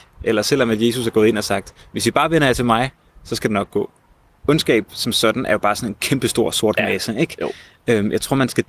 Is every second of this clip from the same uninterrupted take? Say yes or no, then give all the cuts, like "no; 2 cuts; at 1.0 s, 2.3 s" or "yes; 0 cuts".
yes; 0 cuts